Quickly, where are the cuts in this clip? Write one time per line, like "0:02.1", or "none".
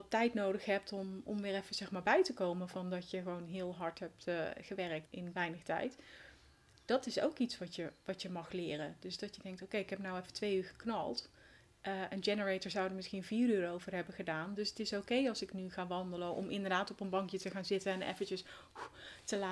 0:05.1